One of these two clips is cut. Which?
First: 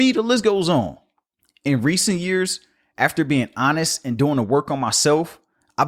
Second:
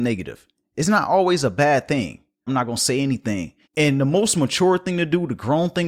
second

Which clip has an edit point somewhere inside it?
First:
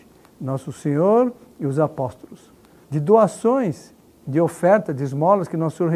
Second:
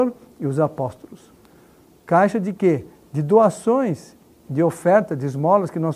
first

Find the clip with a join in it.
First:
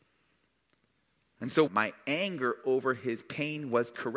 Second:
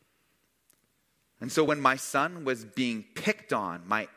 first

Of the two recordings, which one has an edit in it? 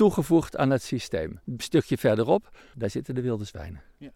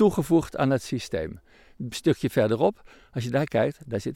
first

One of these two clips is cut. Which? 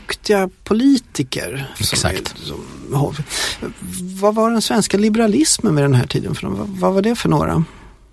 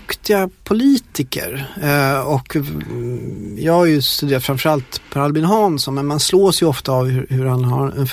first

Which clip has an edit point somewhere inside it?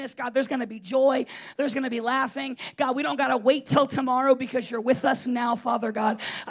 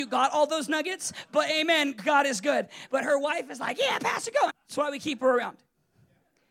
second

